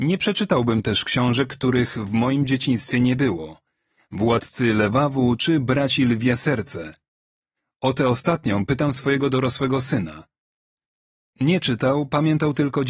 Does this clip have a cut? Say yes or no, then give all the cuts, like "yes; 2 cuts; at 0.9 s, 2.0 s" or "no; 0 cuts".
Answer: yes; 1 cut; at 11.3 s